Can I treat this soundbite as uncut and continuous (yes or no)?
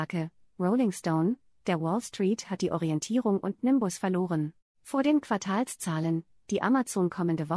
no